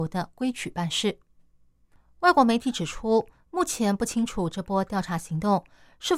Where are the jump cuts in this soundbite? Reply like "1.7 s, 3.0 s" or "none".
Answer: none